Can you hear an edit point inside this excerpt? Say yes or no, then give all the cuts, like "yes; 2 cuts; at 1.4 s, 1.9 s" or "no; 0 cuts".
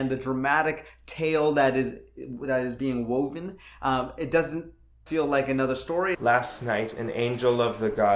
yes; 2 cuts; at 5.1 s, 6.1 s